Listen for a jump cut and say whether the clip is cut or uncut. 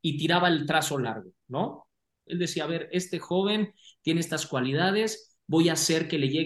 cut